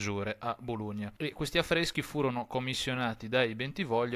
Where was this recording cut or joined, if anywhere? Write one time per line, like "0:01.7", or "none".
0:01.2